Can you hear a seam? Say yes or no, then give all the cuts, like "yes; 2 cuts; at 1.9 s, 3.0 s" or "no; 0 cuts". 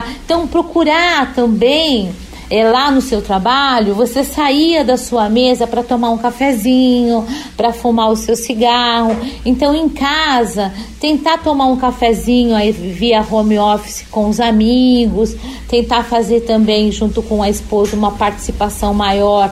yes; 1 cut; at 15.7 s